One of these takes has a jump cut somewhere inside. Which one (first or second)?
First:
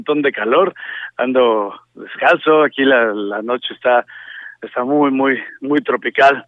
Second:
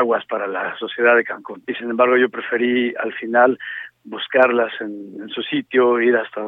second